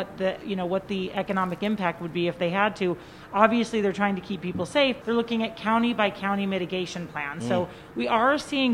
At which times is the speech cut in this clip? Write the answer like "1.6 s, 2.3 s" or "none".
5.0 s